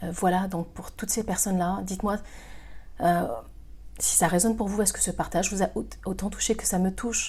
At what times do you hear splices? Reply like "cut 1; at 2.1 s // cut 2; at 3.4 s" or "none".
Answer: none